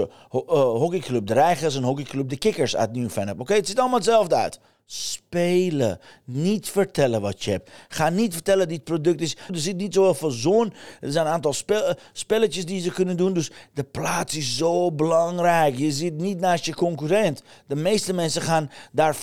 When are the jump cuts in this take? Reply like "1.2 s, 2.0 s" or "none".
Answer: 4.8 s, 9.5 s